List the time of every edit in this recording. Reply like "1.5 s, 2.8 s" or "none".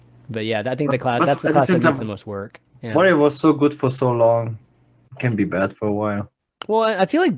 none